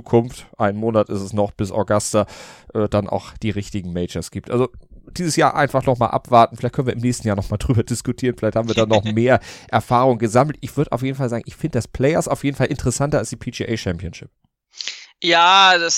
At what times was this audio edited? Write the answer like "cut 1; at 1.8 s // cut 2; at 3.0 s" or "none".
none